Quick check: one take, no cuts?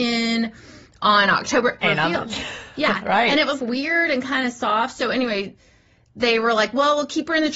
no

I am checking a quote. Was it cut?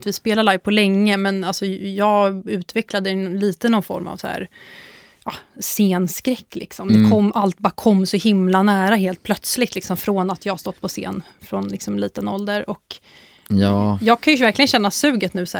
no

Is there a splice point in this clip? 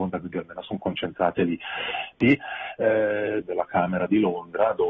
yes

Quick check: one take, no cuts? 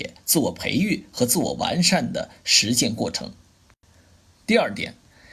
yes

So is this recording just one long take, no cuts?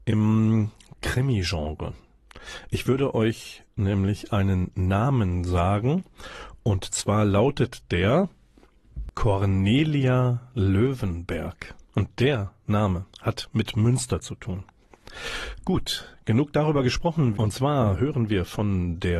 no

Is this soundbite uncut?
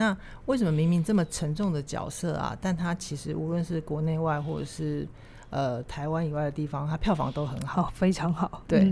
yes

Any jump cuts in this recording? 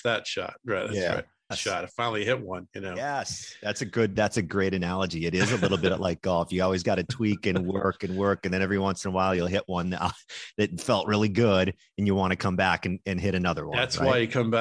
yes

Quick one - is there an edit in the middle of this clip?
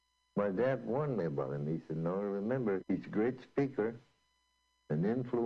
yes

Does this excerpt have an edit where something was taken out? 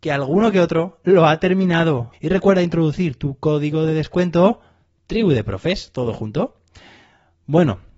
yes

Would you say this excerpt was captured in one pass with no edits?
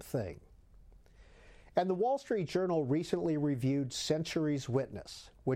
yes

